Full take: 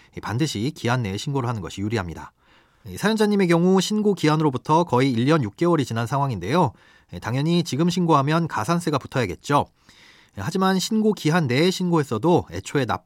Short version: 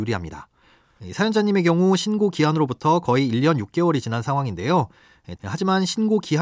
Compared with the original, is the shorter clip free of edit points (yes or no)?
no